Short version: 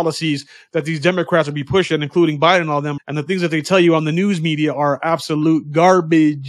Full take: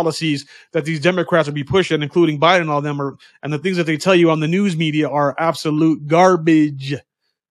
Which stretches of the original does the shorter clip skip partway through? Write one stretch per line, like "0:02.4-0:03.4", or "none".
0:03.0-0:03.3